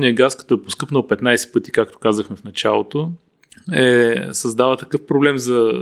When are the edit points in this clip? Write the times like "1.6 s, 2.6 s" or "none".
none